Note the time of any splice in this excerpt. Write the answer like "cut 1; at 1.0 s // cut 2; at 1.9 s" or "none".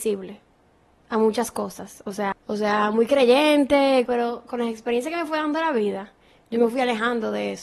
cut 1; at 2.3 s // cut 2; at 4.1 s

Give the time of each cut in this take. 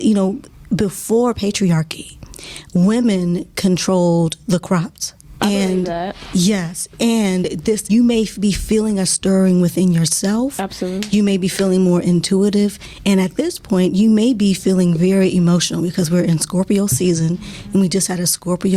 cut 1; at 5.4 s // cut 2; at 7.9 s

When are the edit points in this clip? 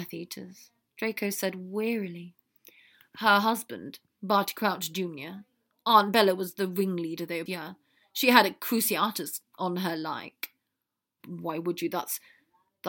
cut 1; at 4.2 s // cut 2; at 7.5 s // cut 3; at 11.2 s

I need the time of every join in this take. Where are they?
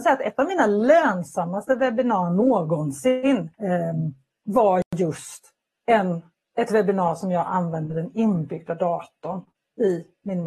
cut 1; at 3.5 s

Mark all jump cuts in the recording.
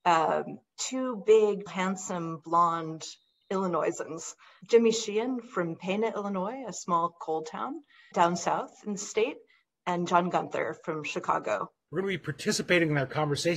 cut 1; at 1.7 s // cut 2; at 8.1 s // cut 3; at 11.9 s

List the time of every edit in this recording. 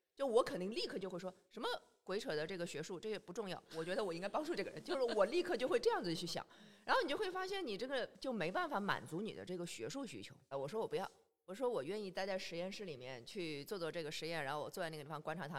cut 1; at 10.5 s

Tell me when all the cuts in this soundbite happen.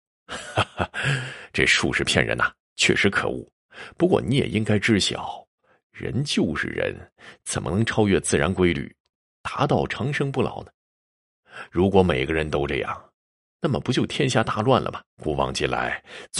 cut 1; at 15.1 s

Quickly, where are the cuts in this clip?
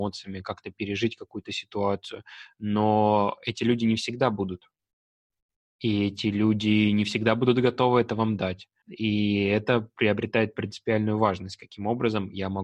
cut 1; at 8.8 s

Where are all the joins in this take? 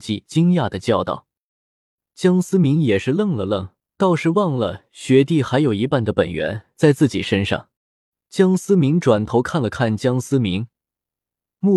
cut 1; at 4.0 s // cut 2; at 7.8 s

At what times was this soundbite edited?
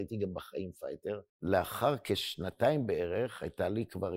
cut 1; at 1.3 s

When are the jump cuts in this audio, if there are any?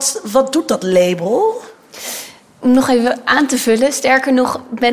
none

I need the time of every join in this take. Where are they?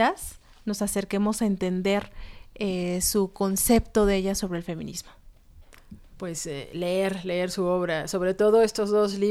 none

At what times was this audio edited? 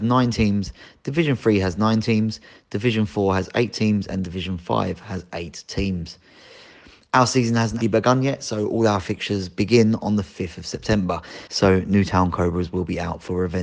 cut 1; at 7.8 s // cut 2; at 11.5 s

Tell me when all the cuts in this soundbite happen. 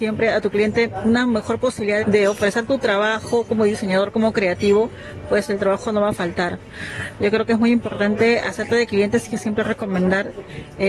cut 1; at 2.0 s

